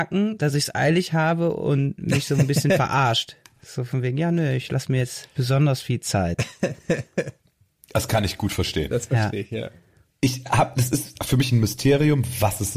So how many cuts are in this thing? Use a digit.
1